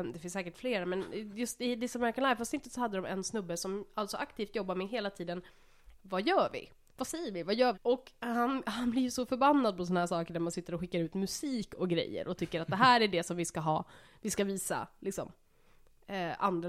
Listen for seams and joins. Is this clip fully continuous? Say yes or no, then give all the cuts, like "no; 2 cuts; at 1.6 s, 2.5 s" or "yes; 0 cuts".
no; 2 cuts; at 5.9 s, 7.7 s